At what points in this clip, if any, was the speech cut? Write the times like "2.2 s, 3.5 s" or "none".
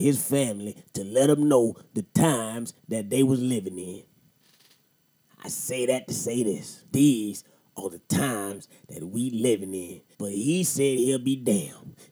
6.9 s, 10.1 s